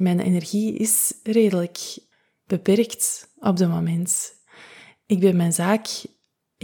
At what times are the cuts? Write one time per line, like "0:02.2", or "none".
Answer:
none